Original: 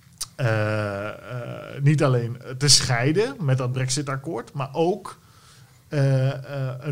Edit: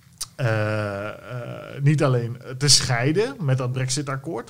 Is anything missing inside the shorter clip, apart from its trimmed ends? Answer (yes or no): no